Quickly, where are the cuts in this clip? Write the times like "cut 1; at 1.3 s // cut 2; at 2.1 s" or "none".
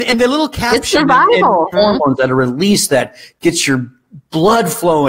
cut 1; at 1.7 s